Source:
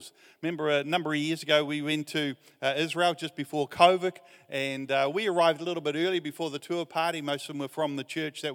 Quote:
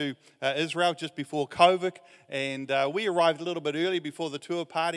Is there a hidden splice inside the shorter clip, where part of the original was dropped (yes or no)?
no